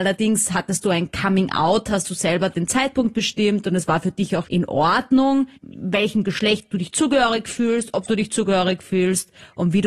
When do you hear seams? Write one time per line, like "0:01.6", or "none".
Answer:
0:04.4
0:05.5